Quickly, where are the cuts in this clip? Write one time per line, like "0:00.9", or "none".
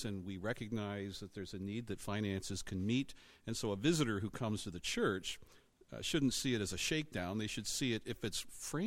none